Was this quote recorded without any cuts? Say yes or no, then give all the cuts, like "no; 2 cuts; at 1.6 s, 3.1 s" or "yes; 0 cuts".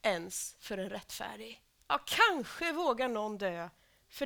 yes; 0 cuts